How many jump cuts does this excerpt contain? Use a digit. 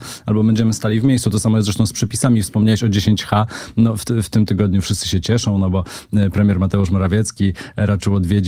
0